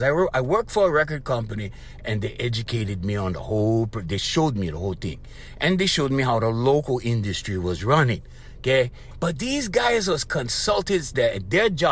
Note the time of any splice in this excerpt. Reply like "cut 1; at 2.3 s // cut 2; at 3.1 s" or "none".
cut 1; at 9.1 s